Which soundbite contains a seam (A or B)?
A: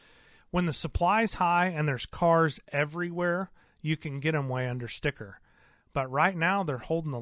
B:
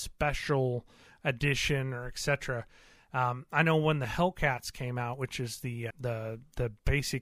B